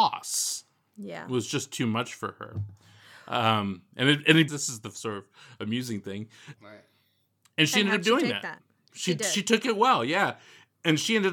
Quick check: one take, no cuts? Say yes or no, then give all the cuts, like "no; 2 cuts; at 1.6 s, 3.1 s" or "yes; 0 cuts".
no; 2 cuts; at 4.5 s, 6.5 s